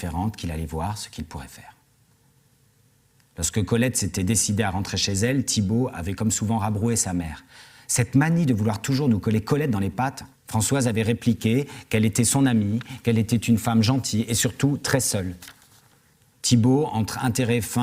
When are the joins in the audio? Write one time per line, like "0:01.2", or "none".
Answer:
0:10.4
0:16.3